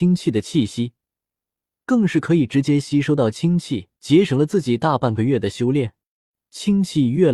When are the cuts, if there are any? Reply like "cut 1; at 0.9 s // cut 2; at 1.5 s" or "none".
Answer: cut 1; at 1.7 s // cut 2; at 4.0 s